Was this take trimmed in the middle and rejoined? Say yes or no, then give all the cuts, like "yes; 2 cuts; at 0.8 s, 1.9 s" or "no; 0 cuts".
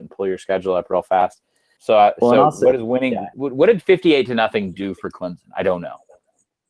yes; 2 cuts; at 1.8 s, 3.3 s